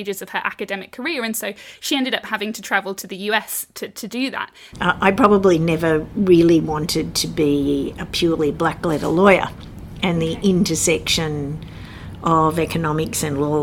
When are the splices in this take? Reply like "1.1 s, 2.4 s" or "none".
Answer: 4.7 s